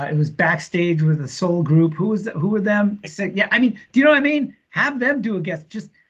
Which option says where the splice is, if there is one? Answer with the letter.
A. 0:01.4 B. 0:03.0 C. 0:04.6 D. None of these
B